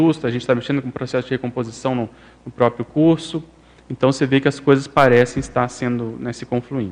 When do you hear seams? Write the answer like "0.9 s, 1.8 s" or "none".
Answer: none